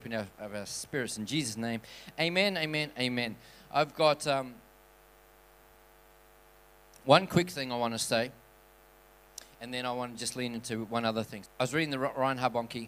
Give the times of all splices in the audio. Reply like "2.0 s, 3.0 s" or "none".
11.5 s